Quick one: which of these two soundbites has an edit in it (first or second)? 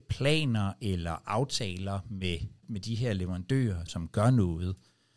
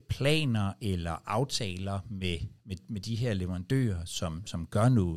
first